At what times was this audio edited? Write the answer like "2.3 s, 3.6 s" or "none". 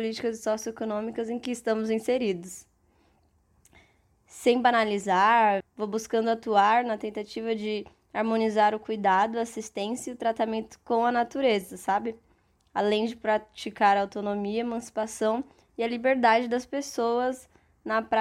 5.6 s